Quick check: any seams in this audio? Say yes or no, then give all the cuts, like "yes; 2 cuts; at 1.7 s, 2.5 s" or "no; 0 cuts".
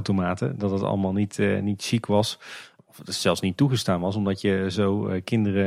no; 0 cuts